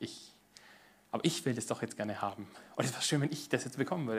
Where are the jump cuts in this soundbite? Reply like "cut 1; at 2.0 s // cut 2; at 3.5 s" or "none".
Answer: none

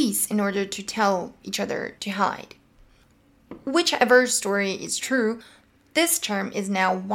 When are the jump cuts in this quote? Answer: cut 1; at 2.0 s

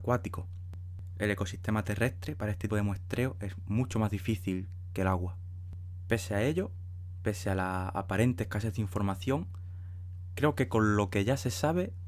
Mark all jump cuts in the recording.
cut 1; at 2.7 s

